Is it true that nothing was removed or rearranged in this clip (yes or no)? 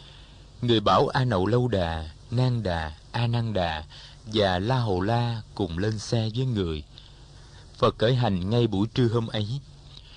yes